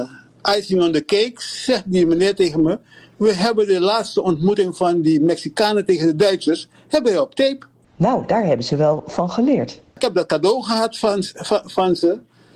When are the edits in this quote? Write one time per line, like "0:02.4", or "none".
0:11.6